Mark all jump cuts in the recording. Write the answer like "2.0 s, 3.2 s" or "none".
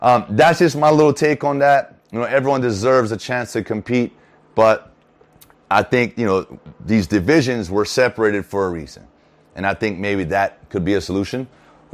none

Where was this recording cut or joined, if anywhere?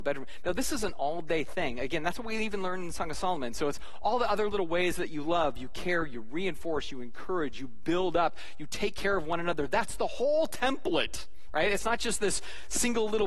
none

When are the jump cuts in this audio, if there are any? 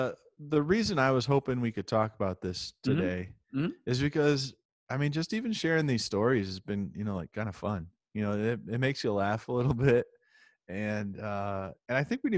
none

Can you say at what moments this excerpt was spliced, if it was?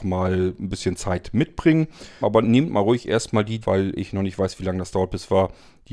2.2 s, 3.6 s

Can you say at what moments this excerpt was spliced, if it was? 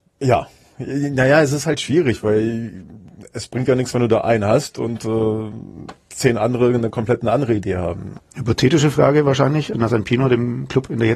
8.2 s, 9.7 s

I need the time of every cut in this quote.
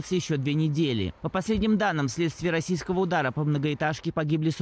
1.2 s

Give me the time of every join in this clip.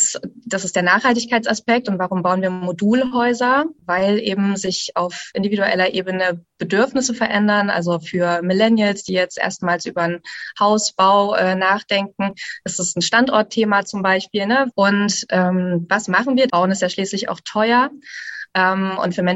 14.7 s, 16.5 s

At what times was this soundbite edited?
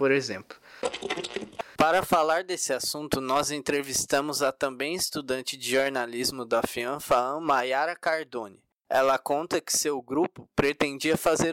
none

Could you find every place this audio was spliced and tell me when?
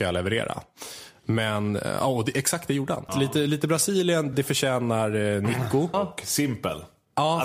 3.1 s, 4.3 s, 5.9 s

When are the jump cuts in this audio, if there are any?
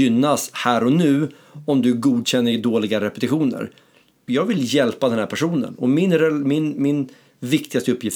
4.3 s

